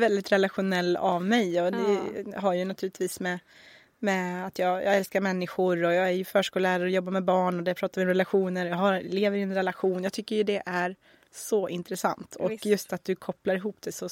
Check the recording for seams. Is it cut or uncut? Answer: uncut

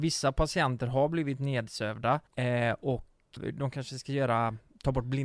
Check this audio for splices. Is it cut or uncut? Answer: cut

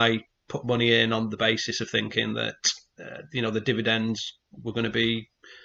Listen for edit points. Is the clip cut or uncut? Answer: uncut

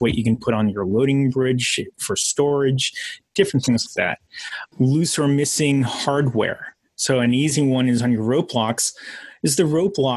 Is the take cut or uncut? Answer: cut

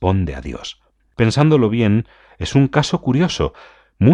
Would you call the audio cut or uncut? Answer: cut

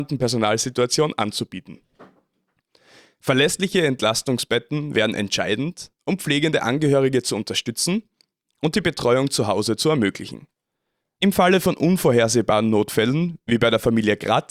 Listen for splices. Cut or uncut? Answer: uncut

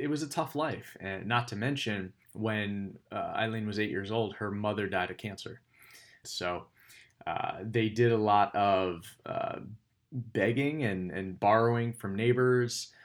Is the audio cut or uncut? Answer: cut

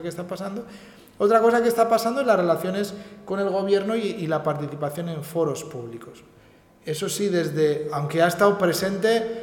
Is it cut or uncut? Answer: uncut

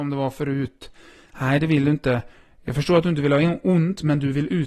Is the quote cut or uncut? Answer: uncut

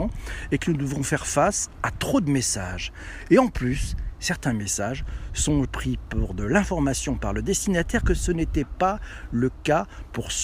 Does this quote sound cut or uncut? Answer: cut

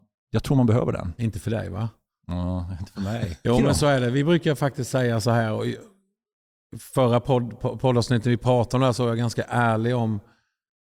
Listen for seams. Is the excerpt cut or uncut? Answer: cut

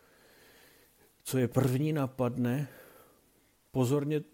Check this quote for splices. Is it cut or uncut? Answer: uncut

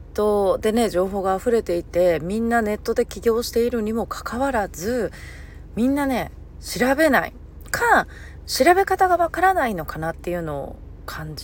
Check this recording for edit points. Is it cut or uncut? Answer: cut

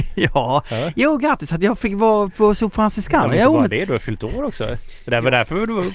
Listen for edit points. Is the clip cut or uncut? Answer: uncut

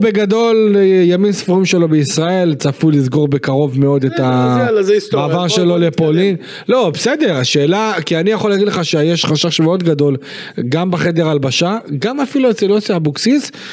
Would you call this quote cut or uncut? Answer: uncut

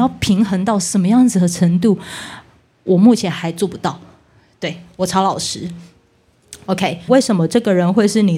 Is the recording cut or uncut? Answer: cut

